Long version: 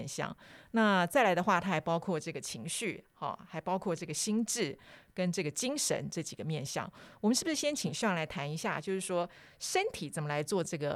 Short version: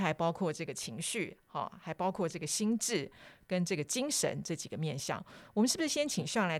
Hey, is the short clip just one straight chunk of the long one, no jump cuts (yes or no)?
yes